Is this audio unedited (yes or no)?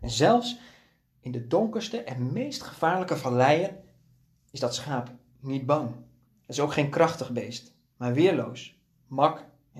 no